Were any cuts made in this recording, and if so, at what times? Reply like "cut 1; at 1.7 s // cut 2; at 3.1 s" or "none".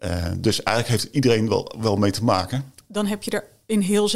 cut 1; at 2.8 s